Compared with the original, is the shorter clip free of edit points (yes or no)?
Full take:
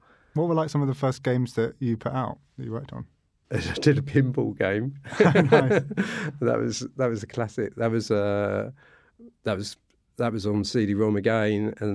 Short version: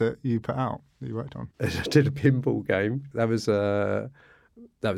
no